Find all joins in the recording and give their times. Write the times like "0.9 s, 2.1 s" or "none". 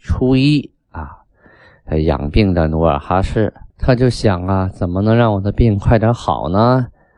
3.7 s

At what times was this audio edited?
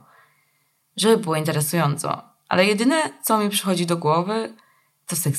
none

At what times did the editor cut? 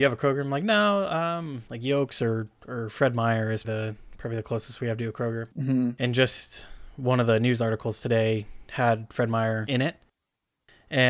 3.6 s, 5.5 s

